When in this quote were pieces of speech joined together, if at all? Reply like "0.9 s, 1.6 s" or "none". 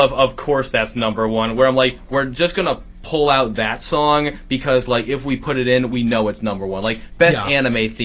none